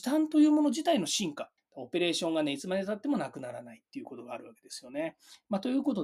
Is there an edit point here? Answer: yes; 1 cut; at 1.6 s

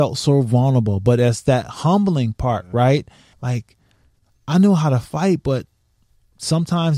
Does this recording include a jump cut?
yes; 1 cut; at 3.3 s

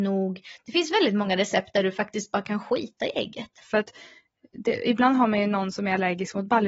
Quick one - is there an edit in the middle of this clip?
yes; 1 cut; at 3.6 s

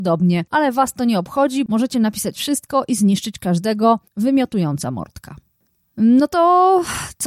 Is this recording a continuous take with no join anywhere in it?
no; 1 cut; at 1.7 s

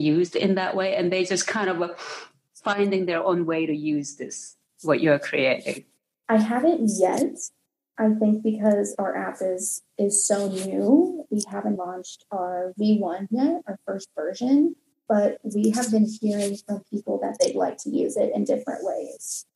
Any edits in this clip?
yes; 1 cut; at 11.8 s

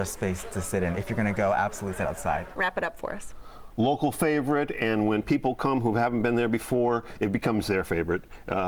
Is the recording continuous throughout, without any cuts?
no; 1 cut; at 2.5 s

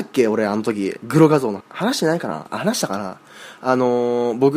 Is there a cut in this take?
yes; 1 cut; at 1.6 s

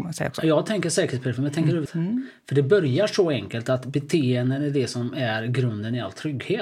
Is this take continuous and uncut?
no; 1 cut; at 1.9 s

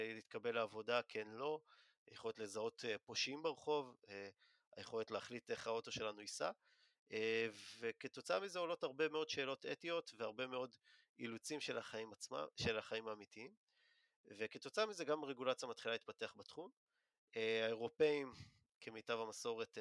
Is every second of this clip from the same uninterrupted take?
yes; 0 cuts

